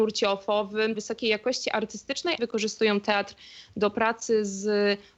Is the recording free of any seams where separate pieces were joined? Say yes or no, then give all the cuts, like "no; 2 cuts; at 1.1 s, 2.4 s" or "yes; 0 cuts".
no; 2 cuts; at 0.9 s, 2.4 s